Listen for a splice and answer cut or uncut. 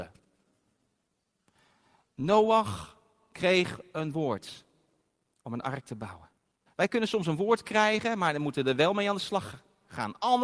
cut